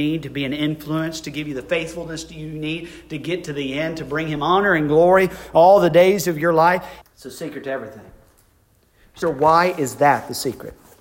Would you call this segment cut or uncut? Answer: cut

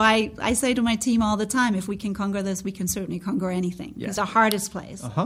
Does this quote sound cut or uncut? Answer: cut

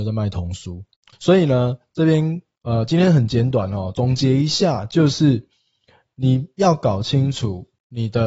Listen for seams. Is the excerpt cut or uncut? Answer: cut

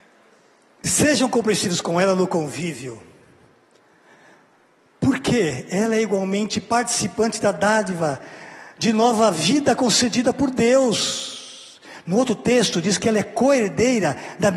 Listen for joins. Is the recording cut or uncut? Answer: uncut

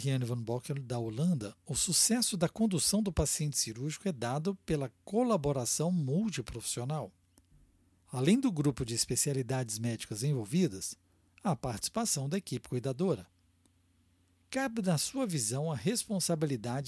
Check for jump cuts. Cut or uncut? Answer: uncut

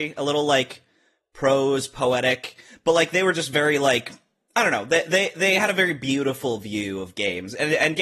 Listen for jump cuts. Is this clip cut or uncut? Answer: uncut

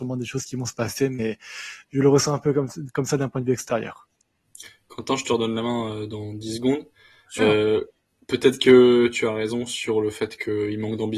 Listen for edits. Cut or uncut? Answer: uncut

